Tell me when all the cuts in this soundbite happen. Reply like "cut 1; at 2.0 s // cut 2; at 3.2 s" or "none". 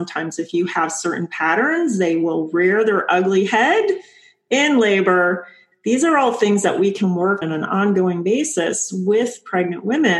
cut 1; at 5.7 s // cut 2; at 7.4 s

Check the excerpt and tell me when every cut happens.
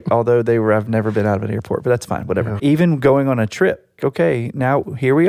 cut 1; at 2.6 s // cut 2; at 4.0 s

